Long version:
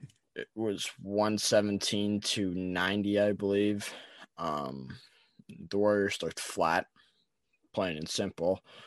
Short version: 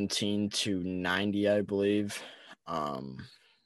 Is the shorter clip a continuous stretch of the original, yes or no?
yes